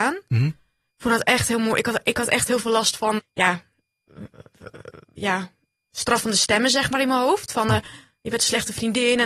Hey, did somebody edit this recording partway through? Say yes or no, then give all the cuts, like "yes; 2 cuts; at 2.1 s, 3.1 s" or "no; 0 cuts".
yes; 1 cut; at 3.2 s